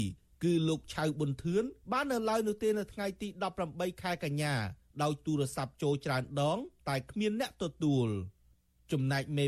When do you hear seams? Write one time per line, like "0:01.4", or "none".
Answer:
none